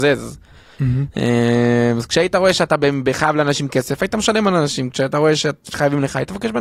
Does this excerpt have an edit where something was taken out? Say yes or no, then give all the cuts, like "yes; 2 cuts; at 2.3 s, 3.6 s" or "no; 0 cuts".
no; 0 cuts